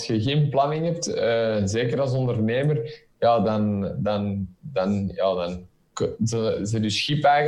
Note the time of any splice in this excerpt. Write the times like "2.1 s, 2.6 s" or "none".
none

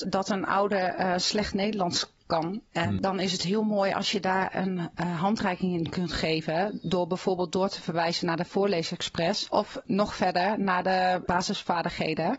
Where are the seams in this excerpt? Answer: none

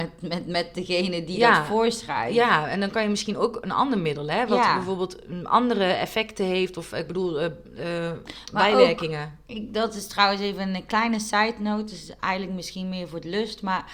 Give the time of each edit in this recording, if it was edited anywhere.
none

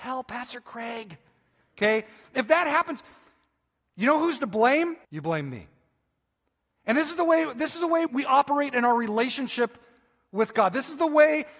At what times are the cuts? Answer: 5.0 s, 8.1 s

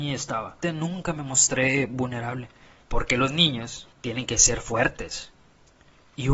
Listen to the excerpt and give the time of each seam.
2.8 s, 3.9 s

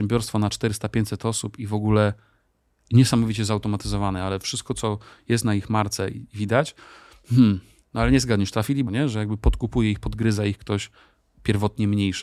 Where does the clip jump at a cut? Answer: 8.9 s

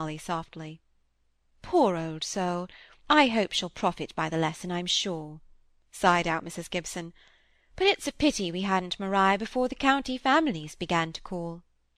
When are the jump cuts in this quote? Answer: none

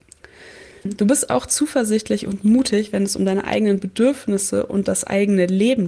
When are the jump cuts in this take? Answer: none

